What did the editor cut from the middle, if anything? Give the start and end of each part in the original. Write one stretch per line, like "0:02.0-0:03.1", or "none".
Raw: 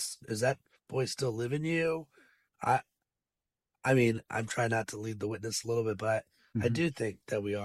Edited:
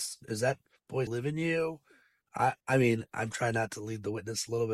0:01.1-0:01.3
0:02.9-0:03.8

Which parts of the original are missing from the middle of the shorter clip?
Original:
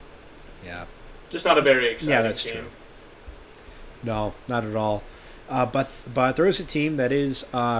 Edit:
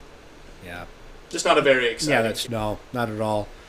0:02.5-0:04.0

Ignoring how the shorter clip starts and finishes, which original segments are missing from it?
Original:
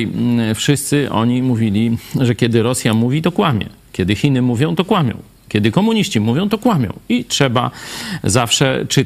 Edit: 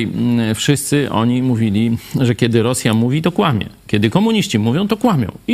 0:03.8-0:05.4

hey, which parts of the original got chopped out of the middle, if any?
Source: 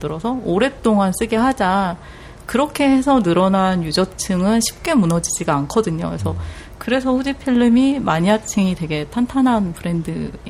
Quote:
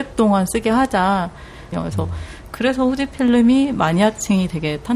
0:02.4-0:06.0

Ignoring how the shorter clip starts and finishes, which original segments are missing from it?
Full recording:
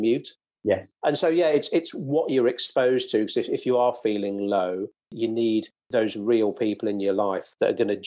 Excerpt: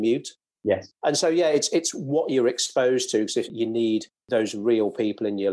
0:03.5-0:05.1

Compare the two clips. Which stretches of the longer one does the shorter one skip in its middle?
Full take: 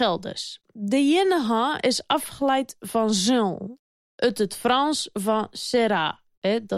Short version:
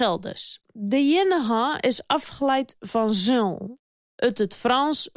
none

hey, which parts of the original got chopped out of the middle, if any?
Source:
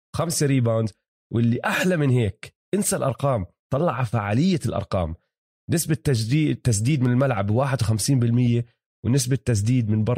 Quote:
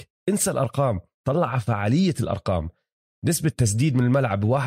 0:06.0-0:06.6

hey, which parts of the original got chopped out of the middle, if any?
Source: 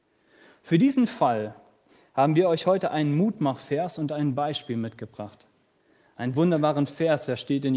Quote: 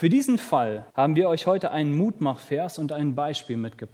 0:01.6-0:02.1

